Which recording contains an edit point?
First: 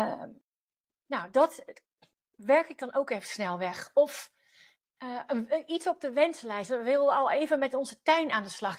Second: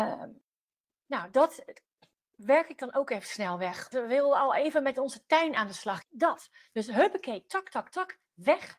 second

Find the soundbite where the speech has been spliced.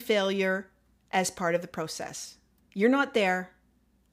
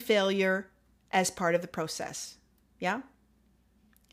first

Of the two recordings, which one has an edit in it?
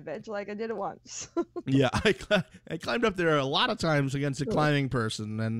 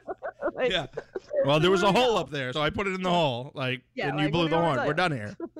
second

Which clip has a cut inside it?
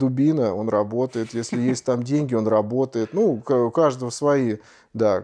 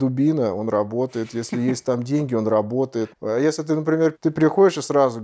second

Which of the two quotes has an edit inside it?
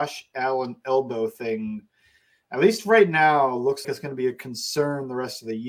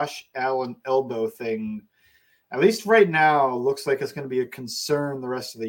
first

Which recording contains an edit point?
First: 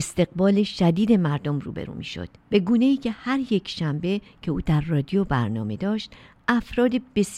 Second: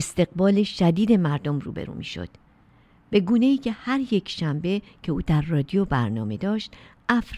first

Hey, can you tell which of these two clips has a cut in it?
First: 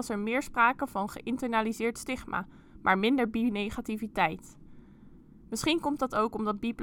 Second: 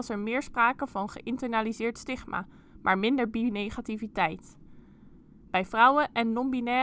second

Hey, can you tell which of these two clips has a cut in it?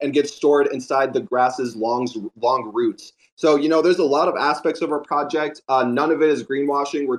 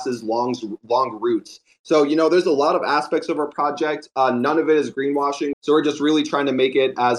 second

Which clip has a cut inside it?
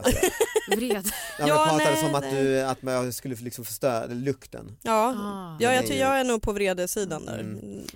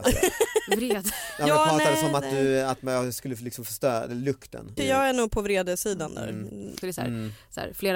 second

